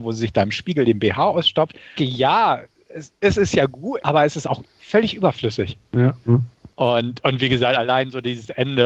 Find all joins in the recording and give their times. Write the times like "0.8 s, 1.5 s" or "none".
2.0 s, 4.0 s, 6.2 s